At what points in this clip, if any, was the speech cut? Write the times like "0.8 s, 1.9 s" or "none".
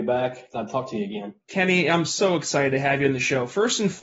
1.4 s